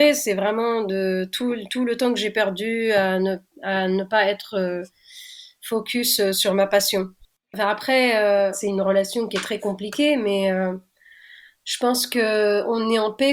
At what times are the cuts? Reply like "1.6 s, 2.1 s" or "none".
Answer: 7.4 s, 8.5 s